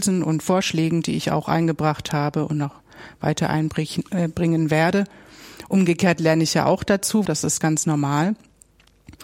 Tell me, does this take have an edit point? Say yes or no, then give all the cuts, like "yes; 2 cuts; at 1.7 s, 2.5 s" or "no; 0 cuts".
yes; 1 cut; at 7.3 s